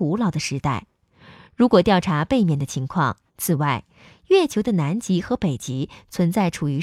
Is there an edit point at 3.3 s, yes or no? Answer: yes